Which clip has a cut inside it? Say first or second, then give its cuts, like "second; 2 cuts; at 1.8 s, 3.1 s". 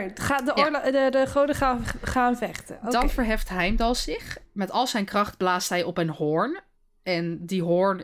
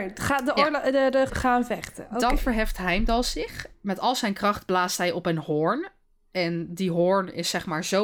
second; 1 cut; at 1.3 s